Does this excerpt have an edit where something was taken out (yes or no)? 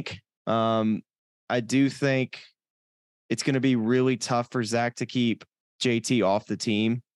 yes